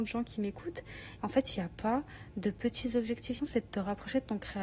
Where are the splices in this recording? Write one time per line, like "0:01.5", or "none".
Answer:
0:01.2
0:03.4